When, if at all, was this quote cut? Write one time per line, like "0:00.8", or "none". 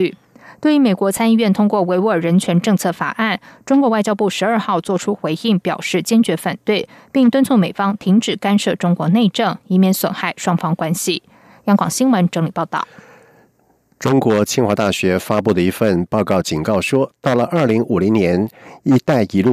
none